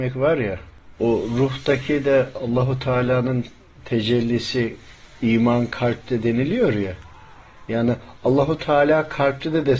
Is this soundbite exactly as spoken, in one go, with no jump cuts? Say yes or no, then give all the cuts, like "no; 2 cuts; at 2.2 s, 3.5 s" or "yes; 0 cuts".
yes; 0 cuts